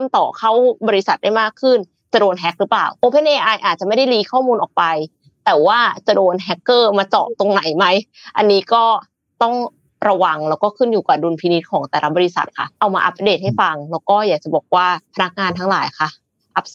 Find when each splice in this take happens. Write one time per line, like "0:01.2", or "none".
0:03.0
0:12.8
0:15.0